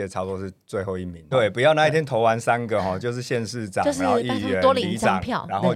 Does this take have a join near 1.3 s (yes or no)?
yes